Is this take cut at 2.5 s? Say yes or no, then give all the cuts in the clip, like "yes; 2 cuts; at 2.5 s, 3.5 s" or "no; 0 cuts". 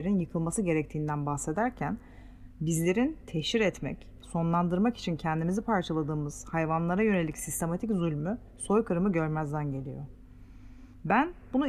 no; 1 cut; at 4.2 s